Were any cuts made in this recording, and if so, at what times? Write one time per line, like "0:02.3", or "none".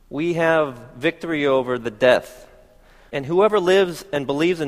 0:03.1

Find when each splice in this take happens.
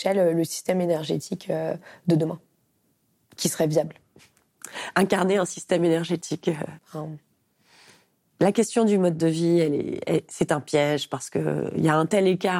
0:06.8

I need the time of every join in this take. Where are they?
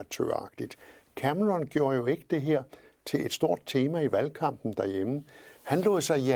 none

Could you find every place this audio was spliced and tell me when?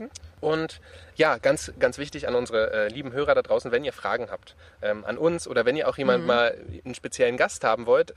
0:01.1

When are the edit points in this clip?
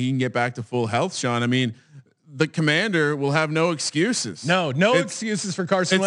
none

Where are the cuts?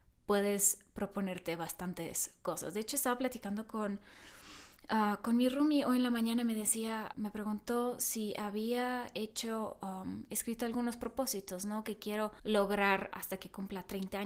0:07.1

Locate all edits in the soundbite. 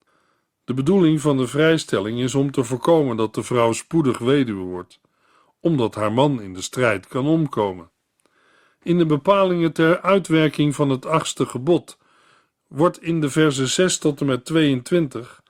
none

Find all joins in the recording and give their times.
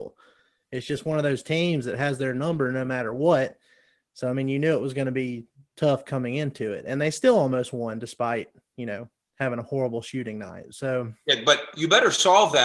none

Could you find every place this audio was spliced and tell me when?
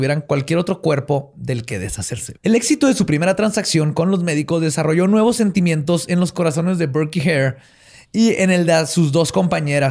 0:02.4

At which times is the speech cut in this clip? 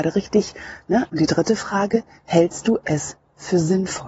0:01.1

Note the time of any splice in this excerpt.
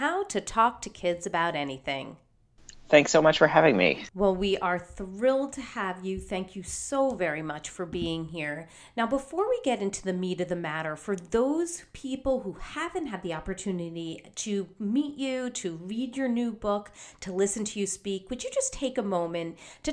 none

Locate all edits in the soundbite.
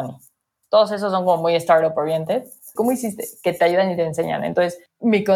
0:02.8

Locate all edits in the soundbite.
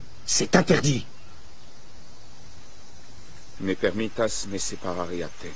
0:03.6

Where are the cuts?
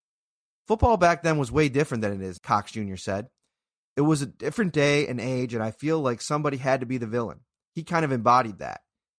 0:02.4

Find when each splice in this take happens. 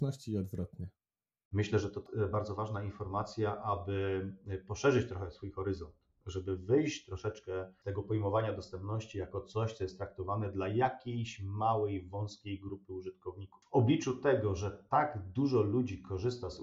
none

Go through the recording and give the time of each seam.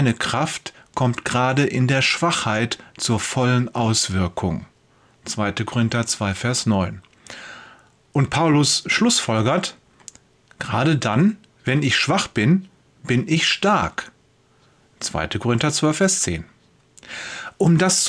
none

